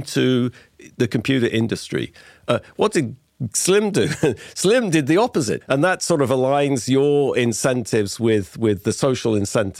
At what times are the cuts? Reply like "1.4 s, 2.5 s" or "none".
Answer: 5.6 s